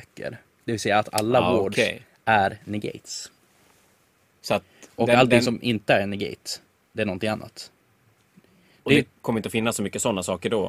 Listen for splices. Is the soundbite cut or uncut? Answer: uncut